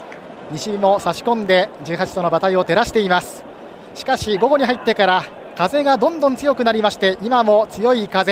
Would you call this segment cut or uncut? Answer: uncut